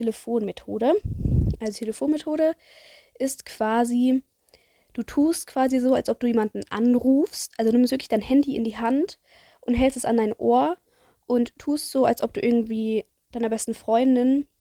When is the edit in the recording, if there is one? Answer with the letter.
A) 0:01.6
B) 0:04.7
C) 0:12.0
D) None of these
D